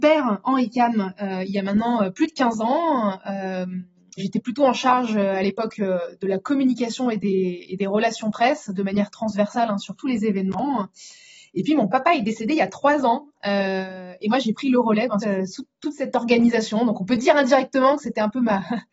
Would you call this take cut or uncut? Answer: cut